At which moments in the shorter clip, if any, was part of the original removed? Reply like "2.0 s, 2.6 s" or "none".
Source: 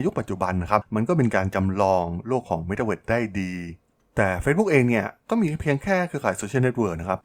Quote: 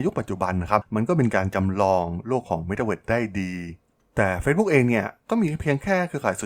none